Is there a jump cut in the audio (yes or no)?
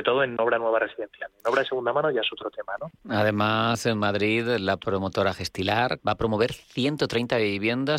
yes